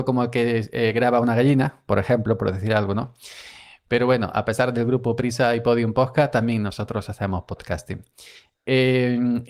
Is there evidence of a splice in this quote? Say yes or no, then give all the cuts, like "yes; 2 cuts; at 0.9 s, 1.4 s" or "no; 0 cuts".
no; 0 cuts